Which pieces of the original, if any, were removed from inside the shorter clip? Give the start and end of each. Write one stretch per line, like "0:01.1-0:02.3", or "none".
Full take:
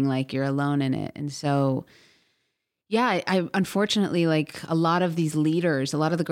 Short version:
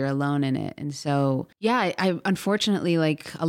0:01.9-0:02.8